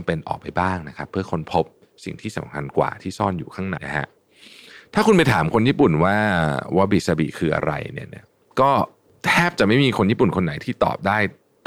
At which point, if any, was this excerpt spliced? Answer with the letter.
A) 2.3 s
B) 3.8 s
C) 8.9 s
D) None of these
B